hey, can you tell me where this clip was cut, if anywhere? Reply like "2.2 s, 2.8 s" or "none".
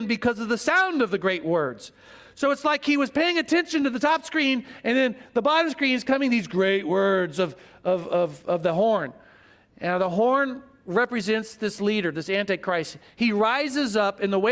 none

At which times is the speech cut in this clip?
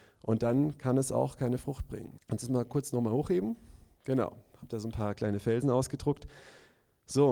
2.2 s

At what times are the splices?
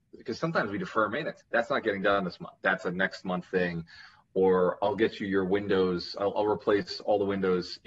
1.4 s, 2.6 s

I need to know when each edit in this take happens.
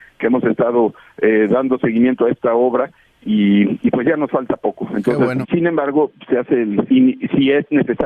5.4 s, 6.9 s

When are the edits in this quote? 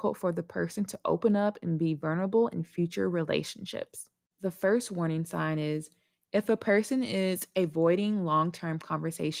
4.3 s

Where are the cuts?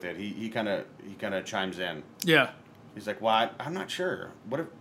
none

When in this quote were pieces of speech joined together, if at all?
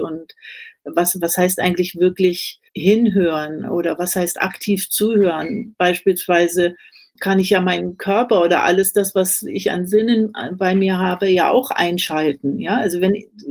2.7 s

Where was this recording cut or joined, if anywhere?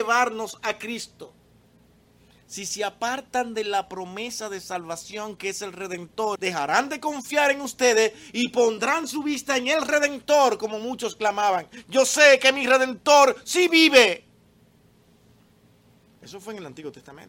6.4 s

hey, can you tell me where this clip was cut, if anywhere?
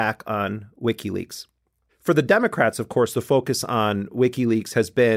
1.9 s

